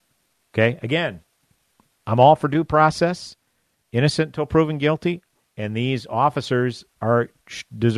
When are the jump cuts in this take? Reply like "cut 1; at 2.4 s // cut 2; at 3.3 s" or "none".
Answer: cut 1; at 5.4 s